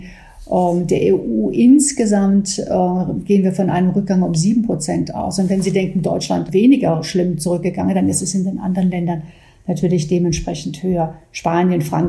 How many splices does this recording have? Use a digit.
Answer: 1